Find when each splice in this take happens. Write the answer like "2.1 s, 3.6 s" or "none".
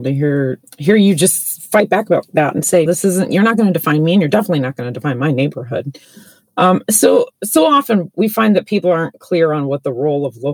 2.9 s